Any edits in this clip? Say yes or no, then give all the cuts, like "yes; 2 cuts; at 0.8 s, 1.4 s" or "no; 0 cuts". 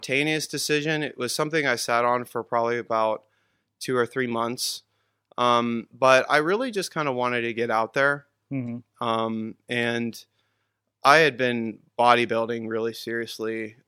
no; 0 cuts